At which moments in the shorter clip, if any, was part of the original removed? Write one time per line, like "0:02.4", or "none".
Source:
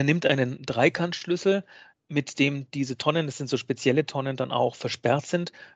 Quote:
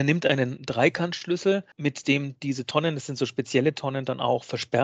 0:01.7